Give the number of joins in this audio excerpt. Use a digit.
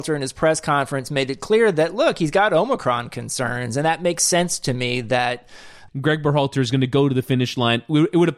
1